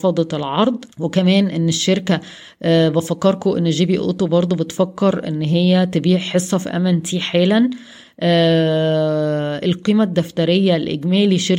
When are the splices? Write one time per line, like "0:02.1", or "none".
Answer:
0:00.9